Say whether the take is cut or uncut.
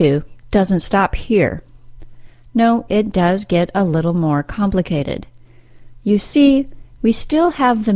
cut